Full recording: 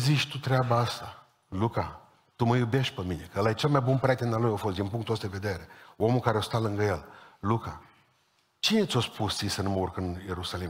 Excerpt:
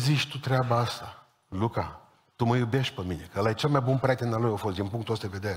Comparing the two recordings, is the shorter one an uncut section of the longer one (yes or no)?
yes